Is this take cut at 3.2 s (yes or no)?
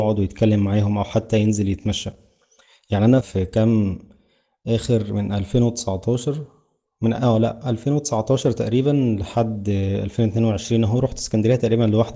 yes